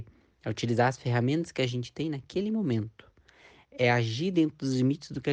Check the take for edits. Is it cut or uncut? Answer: uncut